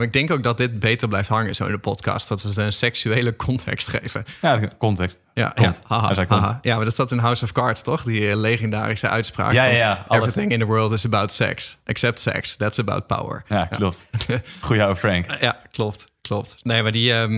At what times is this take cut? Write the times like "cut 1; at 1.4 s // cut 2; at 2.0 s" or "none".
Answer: none